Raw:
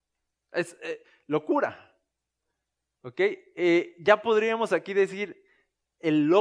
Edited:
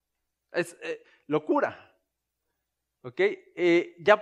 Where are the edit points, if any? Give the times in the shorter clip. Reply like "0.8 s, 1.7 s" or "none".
none